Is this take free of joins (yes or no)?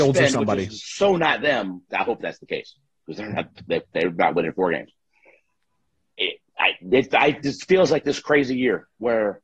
no